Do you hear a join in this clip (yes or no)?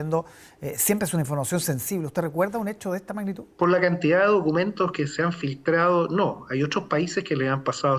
yes